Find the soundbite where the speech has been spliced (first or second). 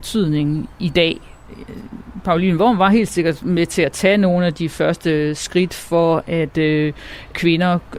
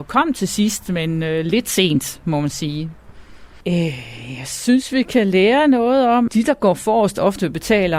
second